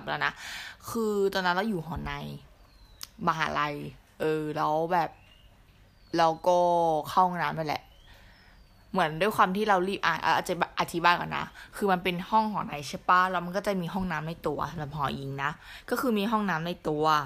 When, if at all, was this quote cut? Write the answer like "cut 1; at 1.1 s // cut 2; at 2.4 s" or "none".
none